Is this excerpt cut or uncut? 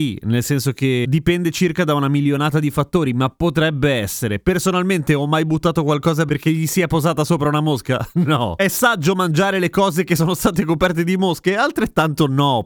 uncut